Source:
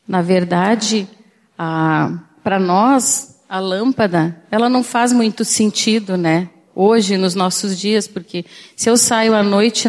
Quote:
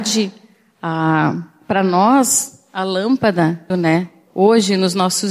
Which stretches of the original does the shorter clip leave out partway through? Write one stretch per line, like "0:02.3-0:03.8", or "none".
0:04.5-0:06.1